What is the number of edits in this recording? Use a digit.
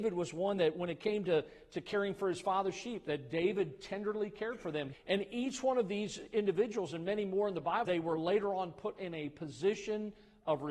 2